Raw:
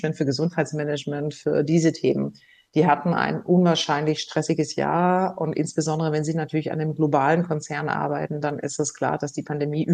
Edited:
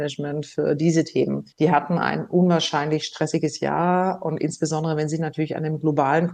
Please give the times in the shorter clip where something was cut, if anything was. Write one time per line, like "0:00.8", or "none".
0:01.5